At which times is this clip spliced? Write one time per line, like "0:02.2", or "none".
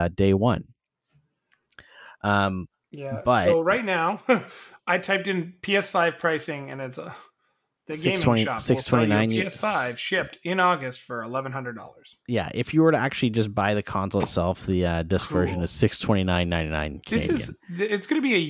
none